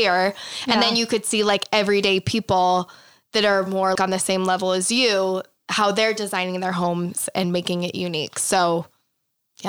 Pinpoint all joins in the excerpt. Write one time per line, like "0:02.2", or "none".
0:04.0

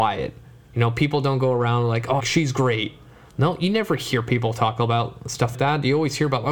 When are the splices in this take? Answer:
0:02.2
0:05.5

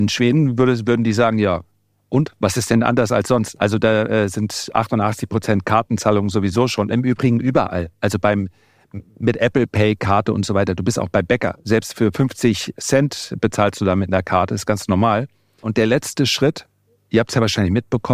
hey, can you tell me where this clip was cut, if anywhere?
0:15.6

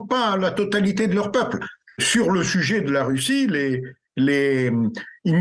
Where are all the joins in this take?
none

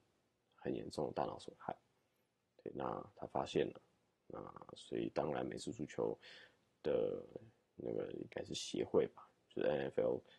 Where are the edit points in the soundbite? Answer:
none

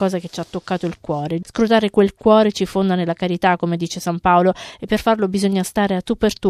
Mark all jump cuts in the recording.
0:01.4

